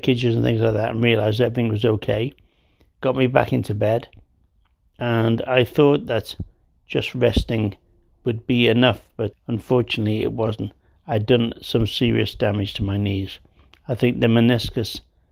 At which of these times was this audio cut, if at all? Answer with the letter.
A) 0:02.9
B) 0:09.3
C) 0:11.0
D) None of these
B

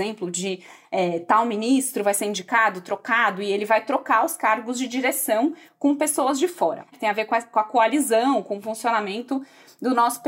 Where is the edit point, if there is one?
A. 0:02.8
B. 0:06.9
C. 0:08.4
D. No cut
B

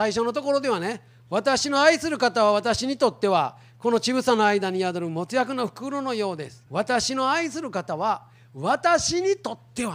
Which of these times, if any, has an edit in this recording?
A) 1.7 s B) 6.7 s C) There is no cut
B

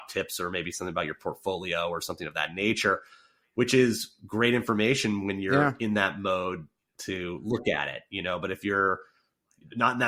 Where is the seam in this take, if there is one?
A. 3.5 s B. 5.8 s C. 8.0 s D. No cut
D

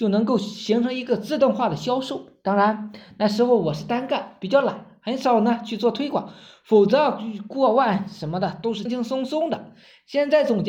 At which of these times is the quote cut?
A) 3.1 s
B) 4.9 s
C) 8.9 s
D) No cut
C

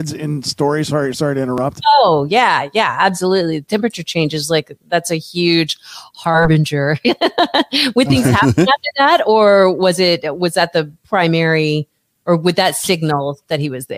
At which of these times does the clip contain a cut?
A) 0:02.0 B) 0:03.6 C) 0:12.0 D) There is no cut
D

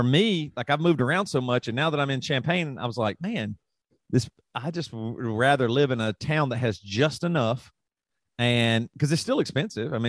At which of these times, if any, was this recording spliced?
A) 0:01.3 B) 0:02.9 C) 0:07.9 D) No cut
D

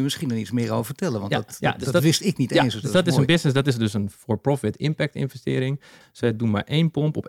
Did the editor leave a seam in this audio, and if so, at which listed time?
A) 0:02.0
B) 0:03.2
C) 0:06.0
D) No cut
C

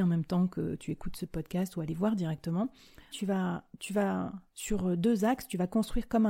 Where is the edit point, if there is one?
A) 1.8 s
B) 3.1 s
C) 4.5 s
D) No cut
B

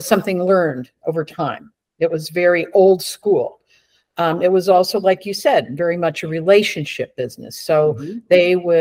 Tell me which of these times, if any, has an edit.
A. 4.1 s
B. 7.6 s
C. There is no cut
C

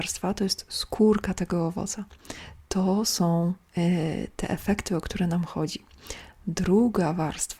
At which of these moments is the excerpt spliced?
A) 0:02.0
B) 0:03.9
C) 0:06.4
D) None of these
D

